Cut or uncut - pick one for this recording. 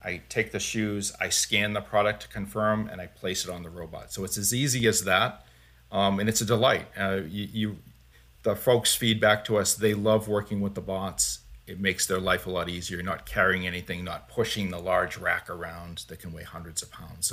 uncut